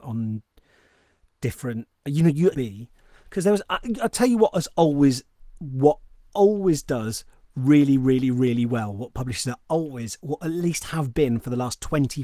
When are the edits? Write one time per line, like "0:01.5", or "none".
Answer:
0:02.5